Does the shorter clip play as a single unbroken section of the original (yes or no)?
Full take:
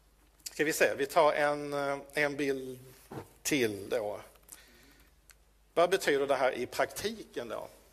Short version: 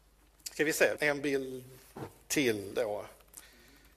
no